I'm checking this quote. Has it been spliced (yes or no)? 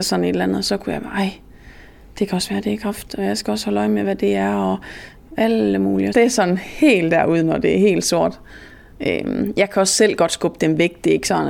yes